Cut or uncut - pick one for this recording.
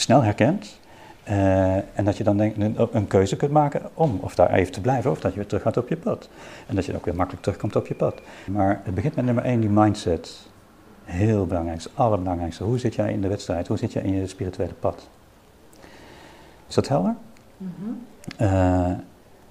cut